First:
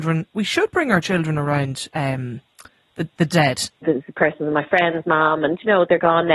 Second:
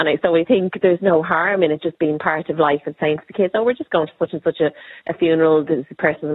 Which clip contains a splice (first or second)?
first